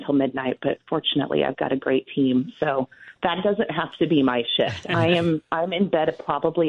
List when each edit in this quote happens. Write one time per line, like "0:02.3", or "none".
none

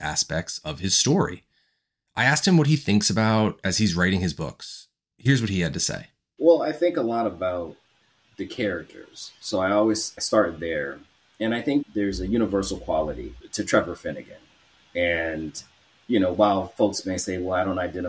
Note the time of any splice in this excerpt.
none

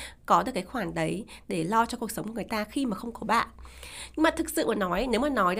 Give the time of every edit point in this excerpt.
none

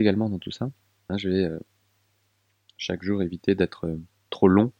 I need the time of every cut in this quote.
0:01.1

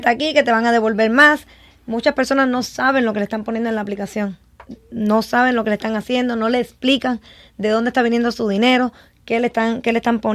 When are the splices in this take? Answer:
none

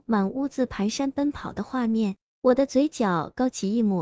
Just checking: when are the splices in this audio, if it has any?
none

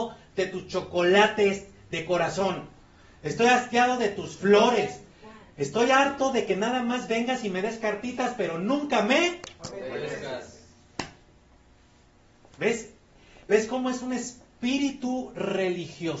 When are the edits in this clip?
none

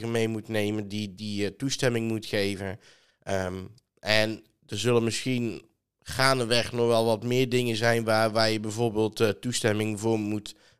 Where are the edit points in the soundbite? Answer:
none

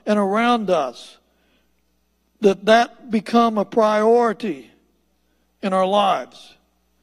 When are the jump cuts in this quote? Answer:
none

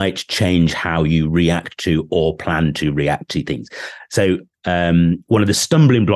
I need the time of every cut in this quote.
0:04.5

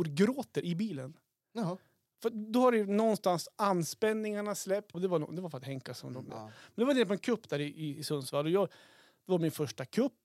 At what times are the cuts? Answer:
0:04.9
0:06.3

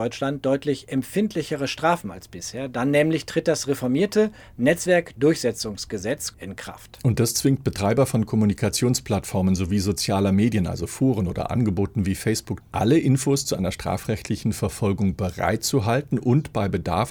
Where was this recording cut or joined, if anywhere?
0:06.3
0:12.6

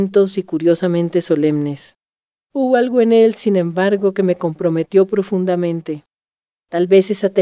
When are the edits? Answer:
0:02.5

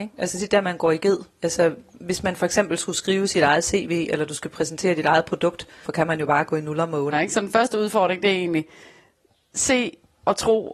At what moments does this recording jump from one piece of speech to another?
0:05.8
0:07.1

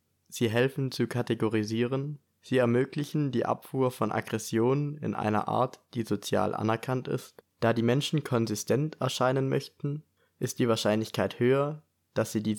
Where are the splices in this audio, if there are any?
0:07.5

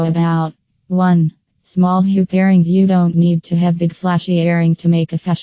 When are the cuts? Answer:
0:03.1

